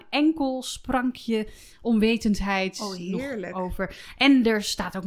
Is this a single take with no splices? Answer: yes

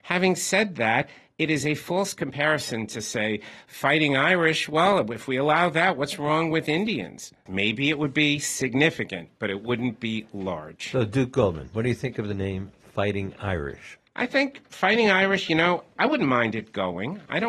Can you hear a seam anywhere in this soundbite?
yes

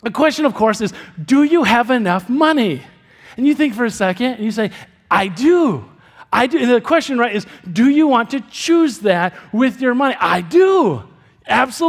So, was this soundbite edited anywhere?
no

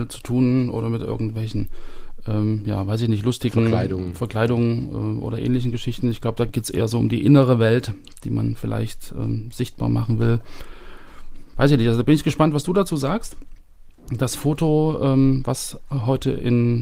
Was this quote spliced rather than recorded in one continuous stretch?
yes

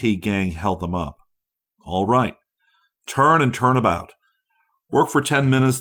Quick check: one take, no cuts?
yes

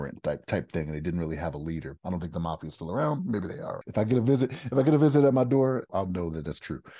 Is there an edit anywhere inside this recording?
yes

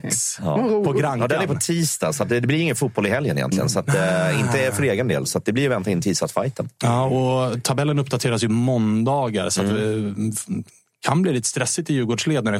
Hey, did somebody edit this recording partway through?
no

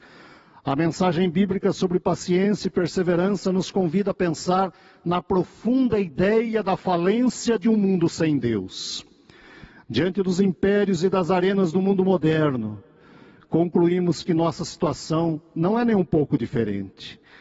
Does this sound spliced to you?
no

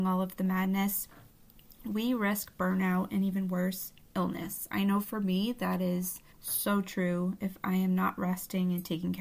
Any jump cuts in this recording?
yes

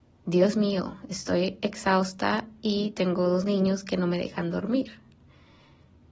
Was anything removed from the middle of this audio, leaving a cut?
no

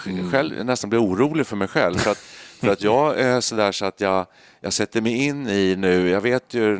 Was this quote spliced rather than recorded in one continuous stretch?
no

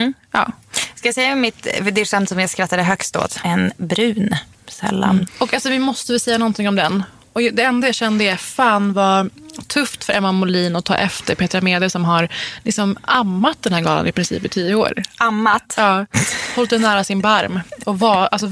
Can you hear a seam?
yes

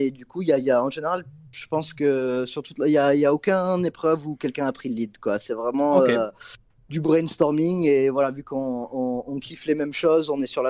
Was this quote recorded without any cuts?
yes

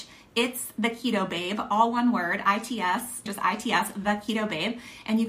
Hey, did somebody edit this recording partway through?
yes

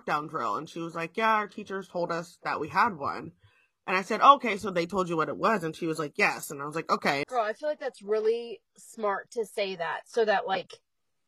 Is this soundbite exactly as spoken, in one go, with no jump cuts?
no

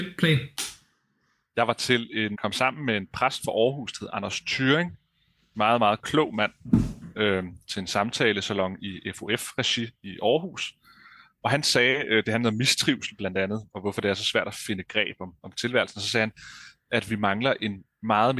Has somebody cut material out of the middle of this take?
yes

